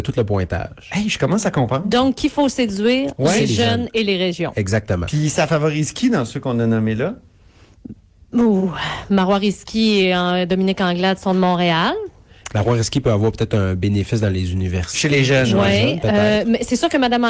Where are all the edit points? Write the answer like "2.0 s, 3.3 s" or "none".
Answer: none